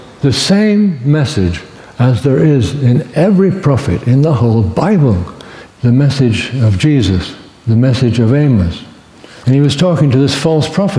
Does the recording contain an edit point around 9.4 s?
yes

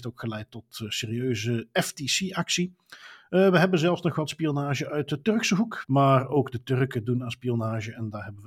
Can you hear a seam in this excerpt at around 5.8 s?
yes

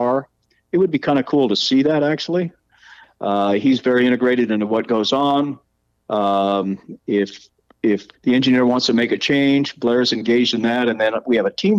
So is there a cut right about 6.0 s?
no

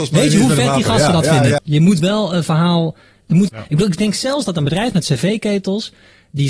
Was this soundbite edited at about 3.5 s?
yes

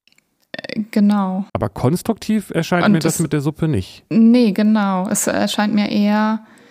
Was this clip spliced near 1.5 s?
yes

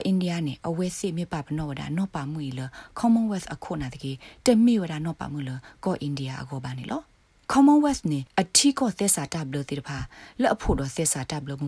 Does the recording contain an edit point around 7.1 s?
no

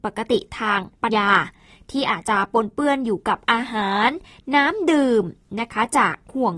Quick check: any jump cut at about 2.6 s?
no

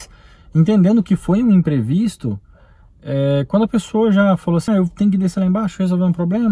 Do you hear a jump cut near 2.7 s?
no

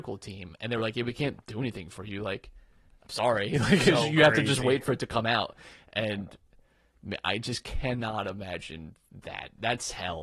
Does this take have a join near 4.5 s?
no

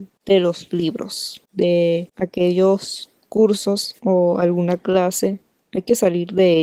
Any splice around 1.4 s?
yes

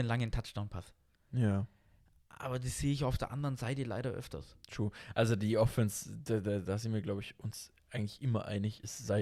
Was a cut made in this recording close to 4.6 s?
yes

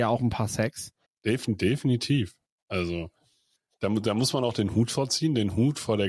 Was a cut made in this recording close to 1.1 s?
yes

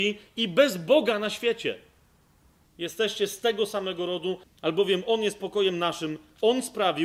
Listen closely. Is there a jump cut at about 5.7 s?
no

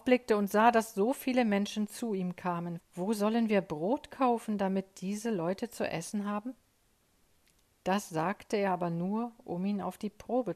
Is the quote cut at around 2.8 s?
yes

